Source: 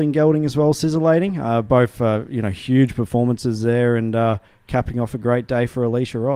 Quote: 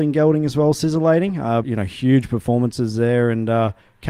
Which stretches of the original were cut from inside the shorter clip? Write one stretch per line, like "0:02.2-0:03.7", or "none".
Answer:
0:01.6-0:02.3